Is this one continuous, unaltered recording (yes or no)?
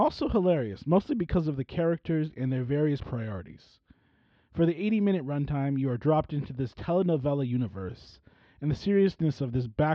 yes